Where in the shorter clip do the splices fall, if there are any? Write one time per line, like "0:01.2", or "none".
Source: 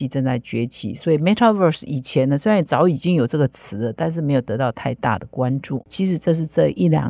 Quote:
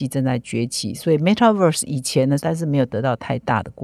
0:02.4